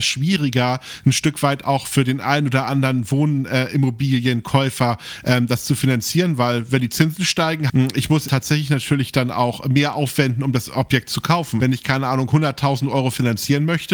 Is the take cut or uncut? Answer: cut